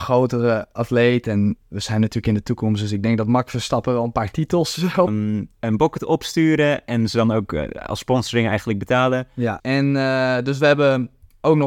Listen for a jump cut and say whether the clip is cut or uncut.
cut